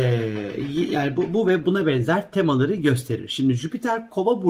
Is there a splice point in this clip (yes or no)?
no